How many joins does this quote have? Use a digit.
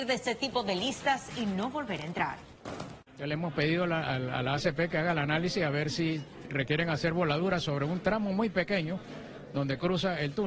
1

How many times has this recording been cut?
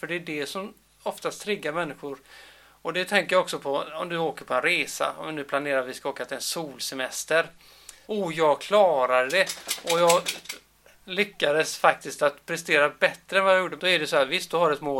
2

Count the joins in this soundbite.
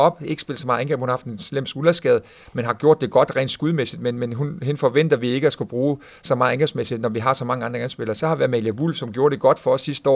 0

